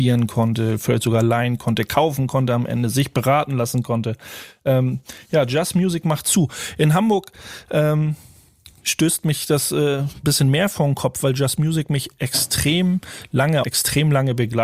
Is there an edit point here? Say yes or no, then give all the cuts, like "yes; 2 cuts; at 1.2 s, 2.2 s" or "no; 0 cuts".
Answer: yes; 2 cuts; at 10.2 s, 13.6 s